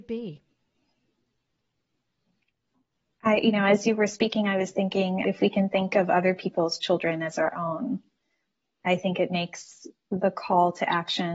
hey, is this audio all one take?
no; 1 cut; at 5.2 s

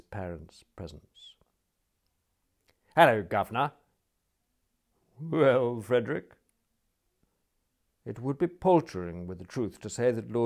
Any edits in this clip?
no; 0 cuts

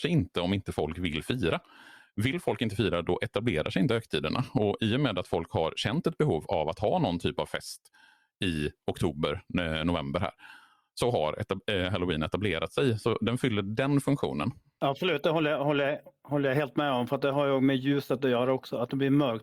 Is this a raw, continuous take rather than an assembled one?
yes; 0 cuts

